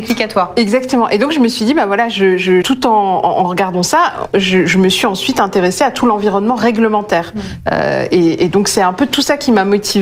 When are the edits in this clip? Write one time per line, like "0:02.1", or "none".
0:02.6

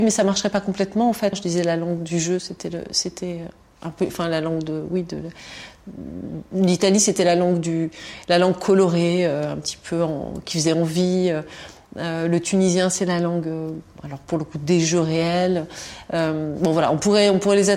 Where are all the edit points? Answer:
0:01.3

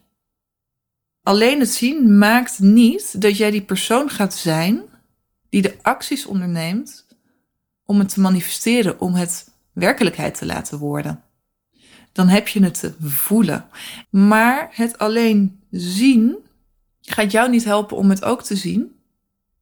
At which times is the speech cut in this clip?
0:14.0

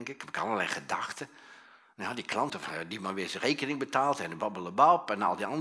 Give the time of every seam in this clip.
0:02.5

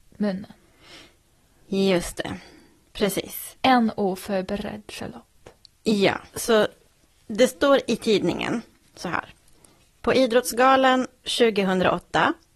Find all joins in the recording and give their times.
0:06.3

